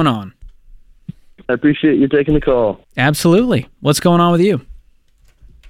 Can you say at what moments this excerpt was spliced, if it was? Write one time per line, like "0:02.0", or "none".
0:01.5